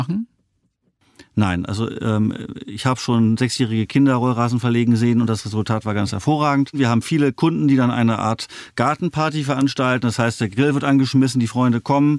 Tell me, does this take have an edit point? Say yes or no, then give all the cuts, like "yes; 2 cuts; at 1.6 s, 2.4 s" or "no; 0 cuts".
no; 0 cuts